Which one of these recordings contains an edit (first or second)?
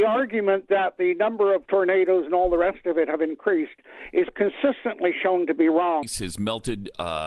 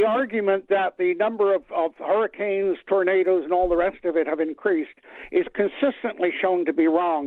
first